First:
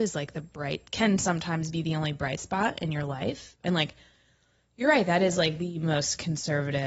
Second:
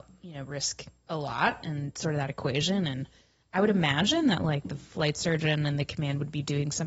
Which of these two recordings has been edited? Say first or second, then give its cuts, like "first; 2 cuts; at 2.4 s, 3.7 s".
first; 1 cut; at 3.6 s